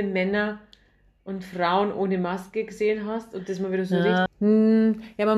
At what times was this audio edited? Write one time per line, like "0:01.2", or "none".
0:04.3